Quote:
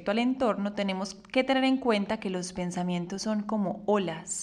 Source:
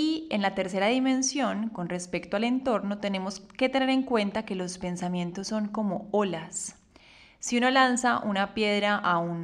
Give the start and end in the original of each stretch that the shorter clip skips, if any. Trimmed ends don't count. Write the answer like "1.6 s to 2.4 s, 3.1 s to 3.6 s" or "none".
none